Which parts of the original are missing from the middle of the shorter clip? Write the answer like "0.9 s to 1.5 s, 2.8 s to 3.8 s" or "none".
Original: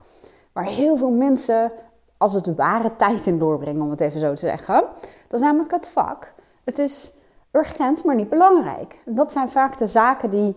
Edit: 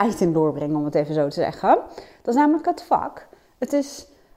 none